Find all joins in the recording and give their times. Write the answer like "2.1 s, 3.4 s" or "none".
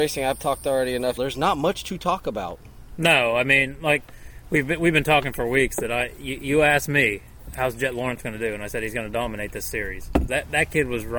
1.2 s, 10.3 s